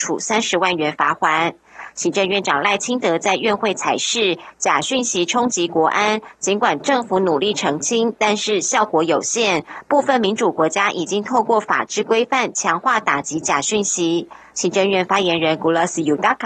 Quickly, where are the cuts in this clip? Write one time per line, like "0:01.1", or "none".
0:14.5